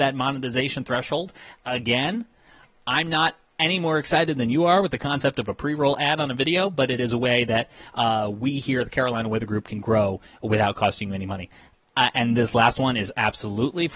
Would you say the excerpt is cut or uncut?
uncut